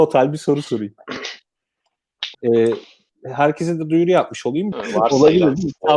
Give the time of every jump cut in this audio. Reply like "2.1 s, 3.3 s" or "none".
2.3 s, 4.7 s